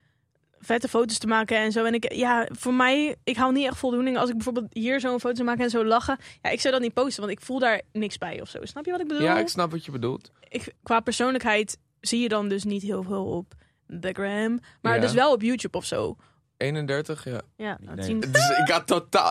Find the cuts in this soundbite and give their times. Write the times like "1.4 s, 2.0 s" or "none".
10.8 s, 16.4 s, 18.2 s